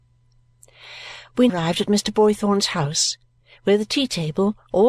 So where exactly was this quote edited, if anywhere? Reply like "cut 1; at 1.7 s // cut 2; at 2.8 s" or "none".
cut 1; at 1.5 s